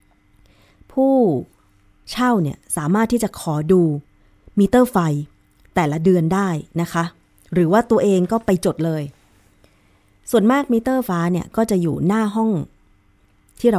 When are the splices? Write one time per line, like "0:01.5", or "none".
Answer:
0:11.1